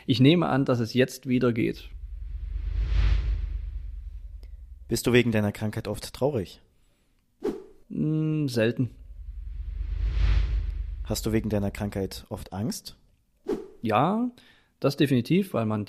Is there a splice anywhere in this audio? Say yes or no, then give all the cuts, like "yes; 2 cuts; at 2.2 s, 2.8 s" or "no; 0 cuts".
no; 0 cuts